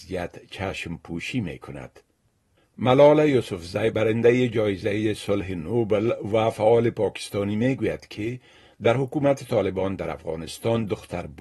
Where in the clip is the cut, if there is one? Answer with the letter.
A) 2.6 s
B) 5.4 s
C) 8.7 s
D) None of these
A